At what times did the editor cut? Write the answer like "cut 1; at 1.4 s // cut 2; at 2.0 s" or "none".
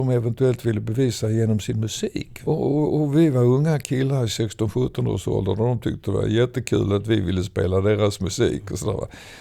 none